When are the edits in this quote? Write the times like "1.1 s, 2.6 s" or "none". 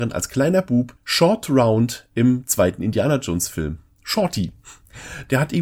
1.0 s